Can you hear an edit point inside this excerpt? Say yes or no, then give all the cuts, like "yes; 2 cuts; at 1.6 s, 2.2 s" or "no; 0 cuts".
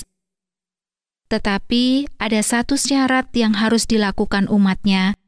yes; 1 cut; at 1.2 s